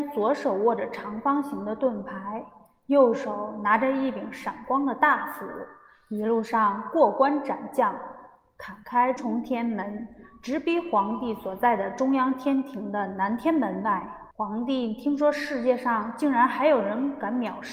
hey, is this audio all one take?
no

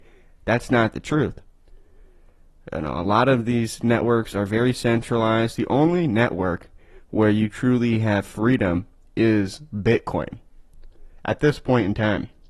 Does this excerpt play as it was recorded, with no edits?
yes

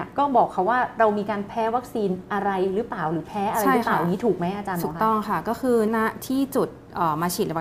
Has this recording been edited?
yes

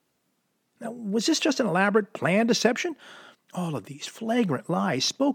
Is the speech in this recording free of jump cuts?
no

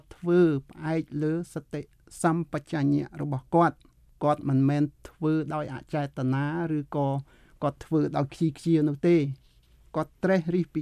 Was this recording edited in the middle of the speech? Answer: no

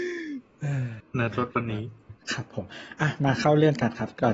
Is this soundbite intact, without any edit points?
no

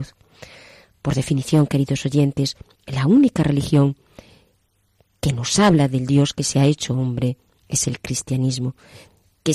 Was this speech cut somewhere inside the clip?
no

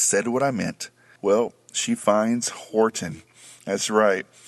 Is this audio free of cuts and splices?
no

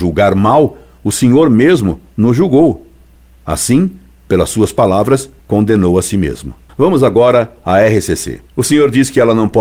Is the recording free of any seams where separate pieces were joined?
yes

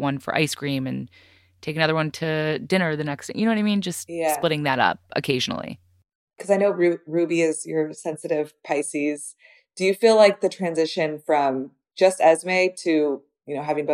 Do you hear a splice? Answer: no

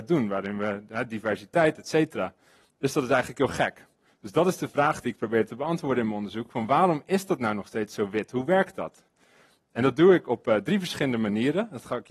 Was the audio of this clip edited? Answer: no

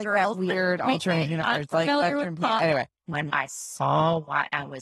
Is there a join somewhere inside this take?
yes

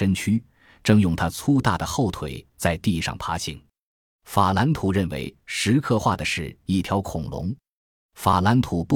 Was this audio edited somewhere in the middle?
no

